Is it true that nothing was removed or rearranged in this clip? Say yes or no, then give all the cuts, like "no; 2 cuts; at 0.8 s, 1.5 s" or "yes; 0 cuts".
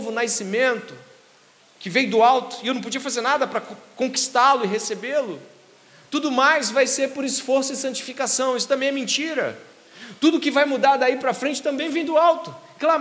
yes; 0 cuts